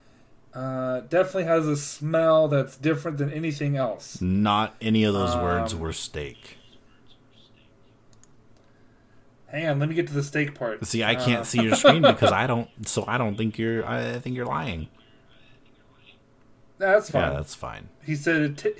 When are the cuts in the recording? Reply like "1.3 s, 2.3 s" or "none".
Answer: none